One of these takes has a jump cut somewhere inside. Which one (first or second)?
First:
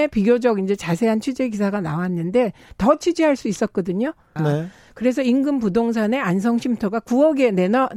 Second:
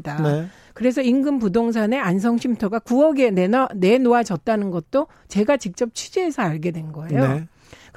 first